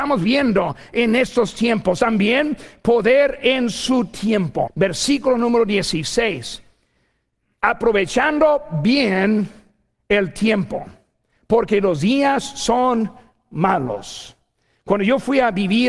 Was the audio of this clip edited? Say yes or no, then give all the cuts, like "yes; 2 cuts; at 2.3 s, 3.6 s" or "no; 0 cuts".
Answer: yes; 1 cut; at 4.7 s